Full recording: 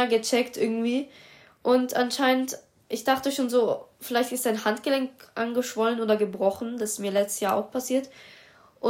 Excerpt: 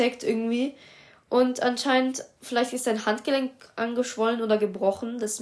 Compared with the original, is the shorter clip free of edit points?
no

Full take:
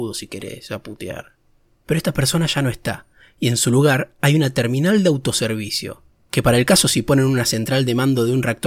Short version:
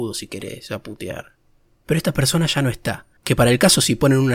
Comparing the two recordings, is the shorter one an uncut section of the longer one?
no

